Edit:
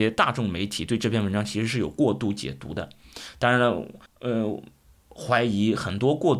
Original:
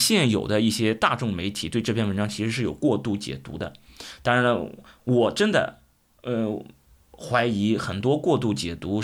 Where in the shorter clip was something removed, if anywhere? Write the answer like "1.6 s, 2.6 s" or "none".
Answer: 4.1 s